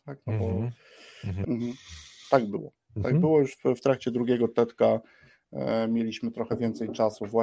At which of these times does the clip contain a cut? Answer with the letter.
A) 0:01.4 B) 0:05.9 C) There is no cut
A